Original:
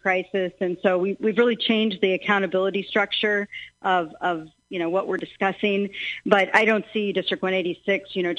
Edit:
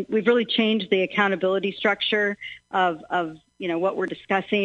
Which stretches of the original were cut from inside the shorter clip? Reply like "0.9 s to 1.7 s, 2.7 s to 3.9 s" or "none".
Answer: none